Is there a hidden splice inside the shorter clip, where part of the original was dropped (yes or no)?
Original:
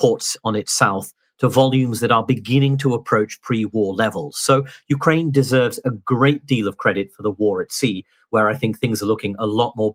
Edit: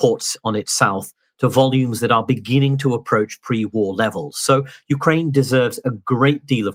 no